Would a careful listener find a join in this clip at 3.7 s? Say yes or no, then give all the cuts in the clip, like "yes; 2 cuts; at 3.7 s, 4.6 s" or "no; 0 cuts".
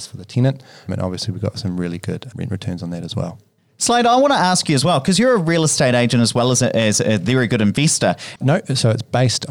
no; 1 cut; at 8.4 s